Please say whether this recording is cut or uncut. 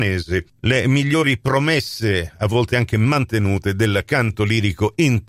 uncut